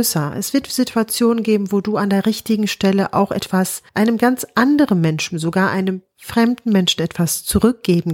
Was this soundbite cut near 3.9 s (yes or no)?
yes